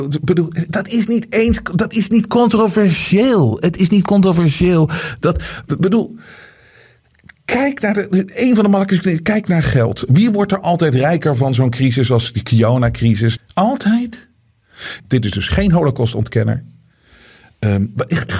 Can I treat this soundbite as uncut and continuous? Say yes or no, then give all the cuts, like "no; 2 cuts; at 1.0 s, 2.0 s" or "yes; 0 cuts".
no; 2 cuts; at 13.4 s, 15.0 s